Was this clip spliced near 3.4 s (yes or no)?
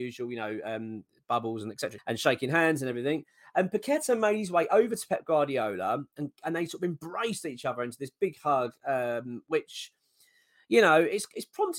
no